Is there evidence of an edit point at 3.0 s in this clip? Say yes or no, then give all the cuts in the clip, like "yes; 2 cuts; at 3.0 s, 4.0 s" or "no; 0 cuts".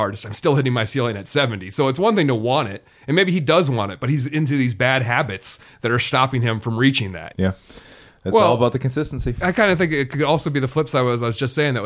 no; 1 cut; at 7.3 s